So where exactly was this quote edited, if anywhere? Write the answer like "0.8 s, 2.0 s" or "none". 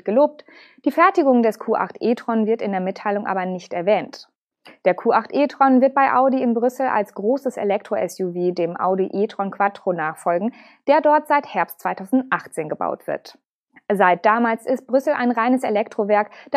none